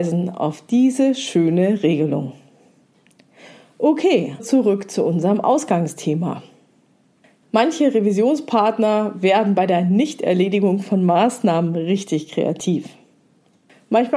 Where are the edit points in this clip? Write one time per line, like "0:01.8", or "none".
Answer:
0:04.4
0:07.4